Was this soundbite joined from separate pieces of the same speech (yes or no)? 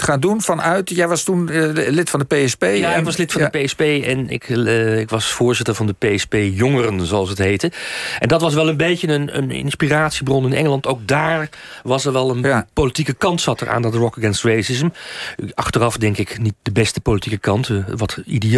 yes